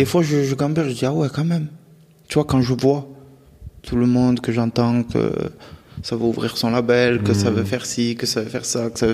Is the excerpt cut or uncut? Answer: uncut